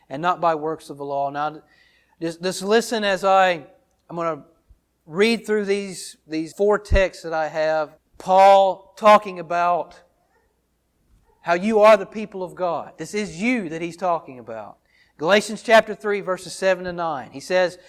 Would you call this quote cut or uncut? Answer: cut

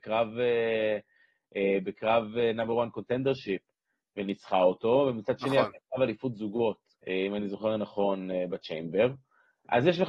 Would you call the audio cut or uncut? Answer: cut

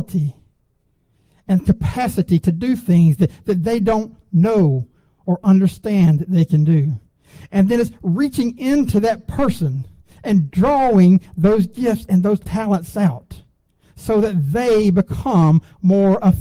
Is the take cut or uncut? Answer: uncut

